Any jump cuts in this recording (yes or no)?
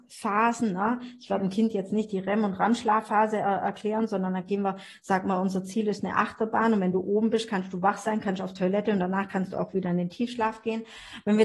no